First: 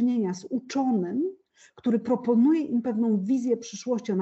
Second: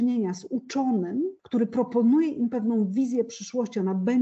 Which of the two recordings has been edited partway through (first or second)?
second